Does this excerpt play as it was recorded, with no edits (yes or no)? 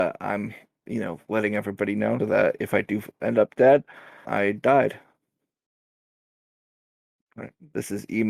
no